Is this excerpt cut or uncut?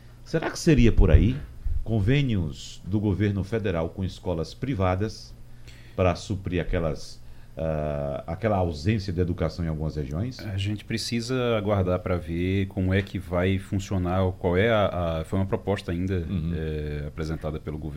uncut